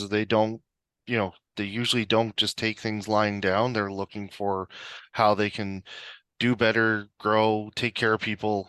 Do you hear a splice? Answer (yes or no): no